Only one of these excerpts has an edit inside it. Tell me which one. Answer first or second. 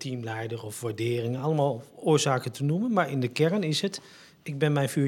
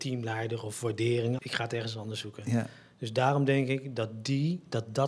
second